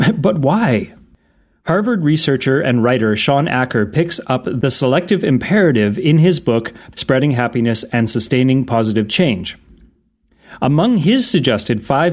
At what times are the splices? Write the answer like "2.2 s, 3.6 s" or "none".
6.9 s